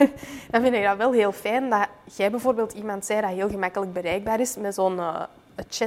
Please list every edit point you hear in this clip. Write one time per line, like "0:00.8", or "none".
none